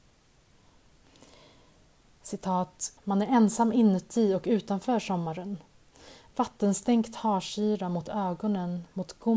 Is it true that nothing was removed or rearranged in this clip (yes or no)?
no